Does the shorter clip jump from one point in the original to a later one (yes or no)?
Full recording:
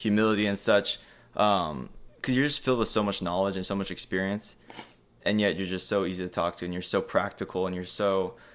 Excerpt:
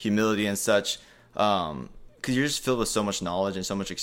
no